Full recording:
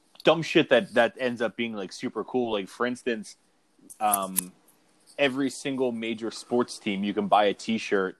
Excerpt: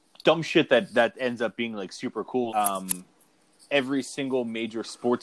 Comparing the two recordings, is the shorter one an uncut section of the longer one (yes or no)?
no